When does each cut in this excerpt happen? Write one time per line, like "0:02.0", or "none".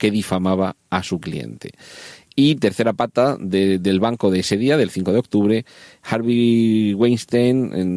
none